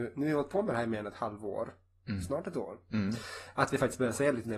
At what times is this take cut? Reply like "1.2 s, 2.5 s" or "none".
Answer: none